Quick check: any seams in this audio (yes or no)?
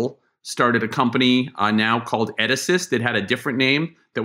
no